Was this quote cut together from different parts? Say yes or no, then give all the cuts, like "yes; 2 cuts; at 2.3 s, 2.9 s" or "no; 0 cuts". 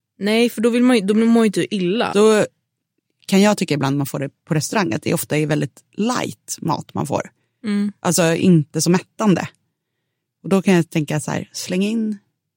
yes; 1 cut; at 2.1 s